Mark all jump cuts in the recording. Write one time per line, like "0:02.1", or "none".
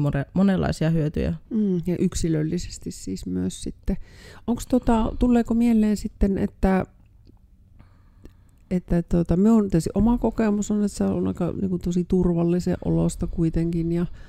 0:01.4